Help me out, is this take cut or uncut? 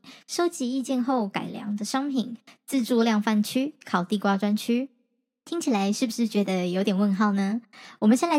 uncut